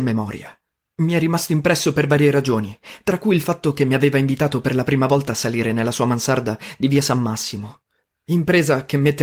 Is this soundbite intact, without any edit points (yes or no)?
no